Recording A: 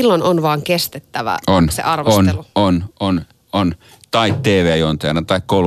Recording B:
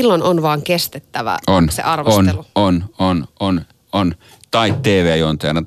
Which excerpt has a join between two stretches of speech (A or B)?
A